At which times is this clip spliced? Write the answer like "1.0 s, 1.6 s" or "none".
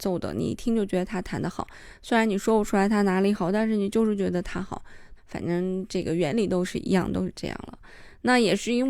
5.2 s